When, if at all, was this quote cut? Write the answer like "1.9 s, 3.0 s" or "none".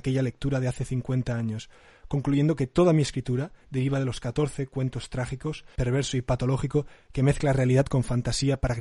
3.6 s, 5.7 s